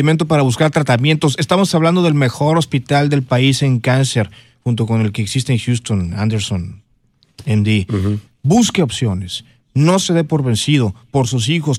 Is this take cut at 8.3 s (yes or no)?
yes